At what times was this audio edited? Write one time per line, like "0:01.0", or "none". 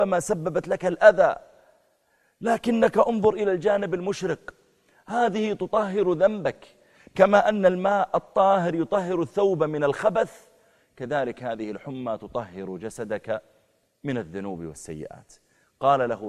none